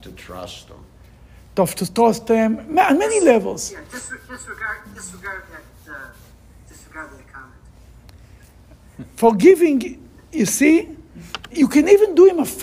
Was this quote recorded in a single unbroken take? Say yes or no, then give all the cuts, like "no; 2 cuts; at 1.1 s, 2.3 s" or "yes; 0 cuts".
no; 1 cut; at 11.5 s